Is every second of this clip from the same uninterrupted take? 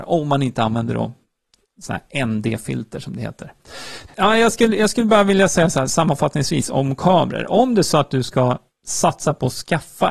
no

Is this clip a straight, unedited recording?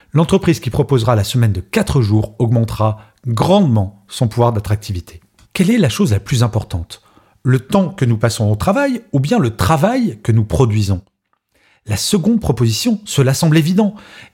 no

